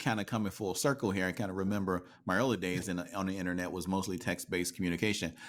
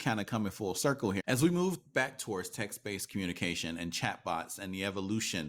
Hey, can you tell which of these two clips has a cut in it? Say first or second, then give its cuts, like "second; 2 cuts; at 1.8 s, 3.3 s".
second; 1 cut; at 1.2 s